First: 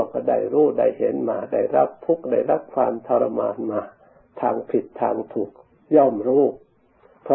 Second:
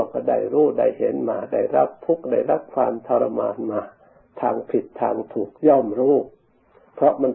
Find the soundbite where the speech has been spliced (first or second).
second